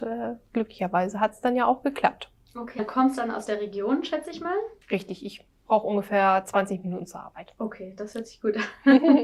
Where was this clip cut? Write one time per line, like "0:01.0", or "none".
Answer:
0:02.8
0:04.8